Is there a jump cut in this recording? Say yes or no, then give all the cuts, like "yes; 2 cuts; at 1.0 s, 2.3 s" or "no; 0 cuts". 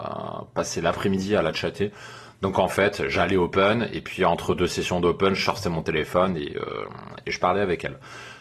no; 0 cuts